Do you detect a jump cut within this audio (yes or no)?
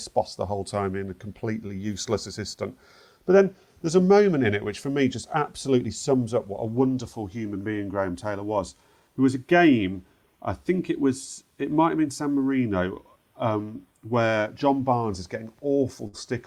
no